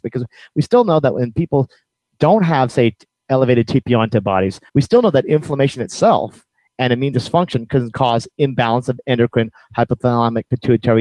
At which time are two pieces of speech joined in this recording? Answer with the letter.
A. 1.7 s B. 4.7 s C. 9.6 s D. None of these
B